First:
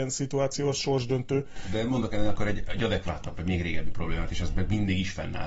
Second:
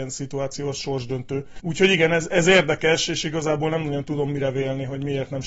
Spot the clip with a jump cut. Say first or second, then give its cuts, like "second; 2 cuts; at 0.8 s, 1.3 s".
second; 1 cut; at 1.6 s